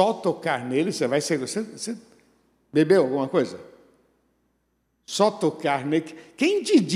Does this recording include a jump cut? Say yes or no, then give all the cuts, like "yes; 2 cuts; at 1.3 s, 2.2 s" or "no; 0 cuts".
no; 0 cuts